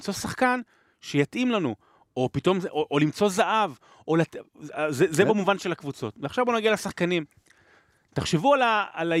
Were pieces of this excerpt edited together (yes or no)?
no